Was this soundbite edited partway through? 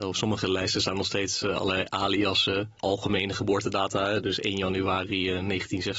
yes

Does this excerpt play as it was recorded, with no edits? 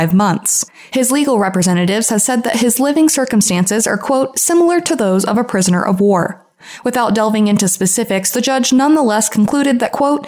yes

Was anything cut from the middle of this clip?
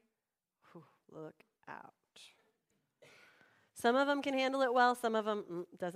no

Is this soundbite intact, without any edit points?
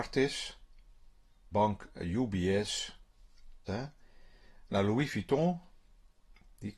no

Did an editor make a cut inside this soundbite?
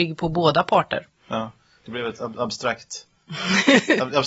no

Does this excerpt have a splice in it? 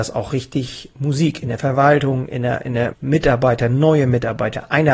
yes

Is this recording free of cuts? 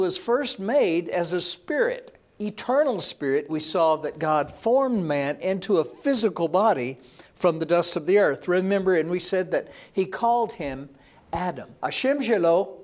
no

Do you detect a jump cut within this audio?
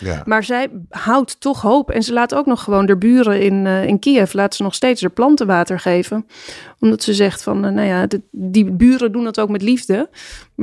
no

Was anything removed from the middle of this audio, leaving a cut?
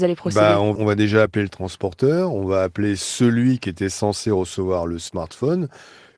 no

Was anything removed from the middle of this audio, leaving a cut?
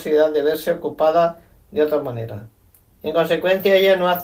yes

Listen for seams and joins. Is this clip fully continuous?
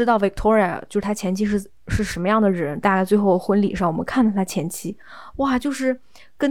no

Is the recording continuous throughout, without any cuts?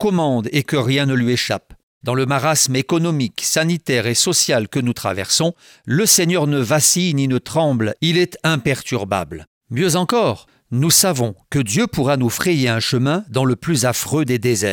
yes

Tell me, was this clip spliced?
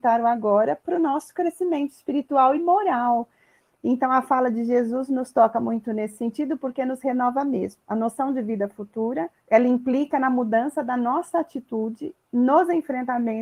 yes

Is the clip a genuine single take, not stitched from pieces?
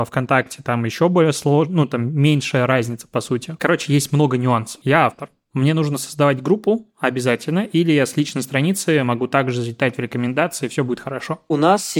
no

